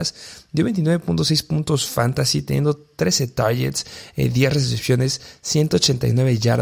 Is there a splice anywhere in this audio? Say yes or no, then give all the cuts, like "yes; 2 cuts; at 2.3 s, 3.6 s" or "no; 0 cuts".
no; 0 cuts